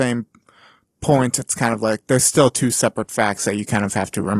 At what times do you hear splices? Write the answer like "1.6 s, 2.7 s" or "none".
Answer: none